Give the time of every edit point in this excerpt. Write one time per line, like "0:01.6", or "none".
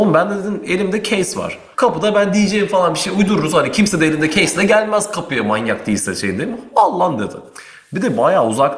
0:01.7